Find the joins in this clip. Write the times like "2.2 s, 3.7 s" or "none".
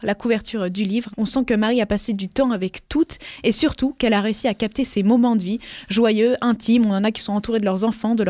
1.1 s